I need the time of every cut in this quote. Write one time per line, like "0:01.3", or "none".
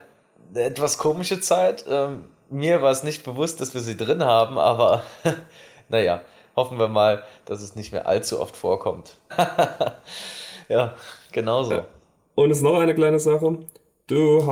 0:09.3